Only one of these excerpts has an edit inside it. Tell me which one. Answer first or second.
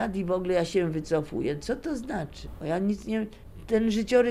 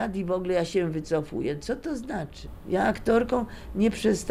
first